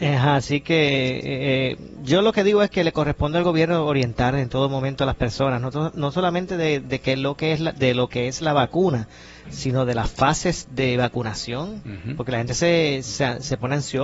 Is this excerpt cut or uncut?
uncut